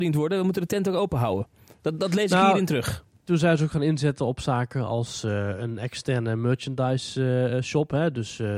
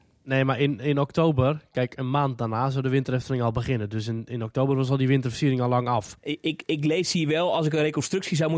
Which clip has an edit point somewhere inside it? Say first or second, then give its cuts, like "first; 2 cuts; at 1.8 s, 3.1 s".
second; 1 cut; at 6.2 s